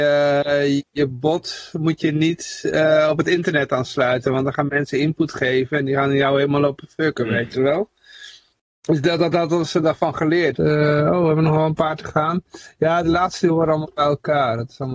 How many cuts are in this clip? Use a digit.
1